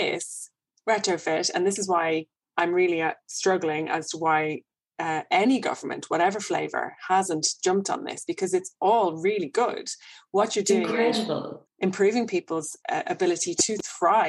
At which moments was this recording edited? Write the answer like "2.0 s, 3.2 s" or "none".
11.6 s, 12.8 s